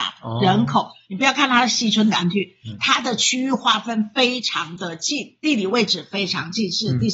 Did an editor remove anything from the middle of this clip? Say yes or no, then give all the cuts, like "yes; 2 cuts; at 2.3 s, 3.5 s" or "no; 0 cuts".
yes; 1 cut; at 1.1 s